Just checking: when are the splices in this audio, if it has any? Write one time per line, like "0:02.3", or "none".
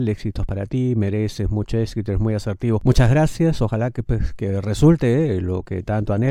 0:03.6